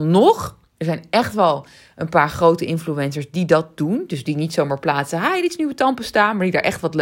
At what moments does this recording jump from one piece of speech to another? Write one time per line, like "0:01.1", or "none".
none